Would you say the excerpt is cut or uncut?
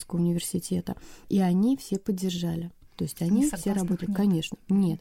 uncut